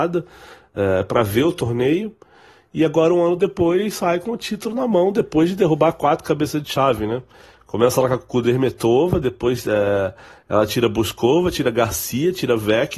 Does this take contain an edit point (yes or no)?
no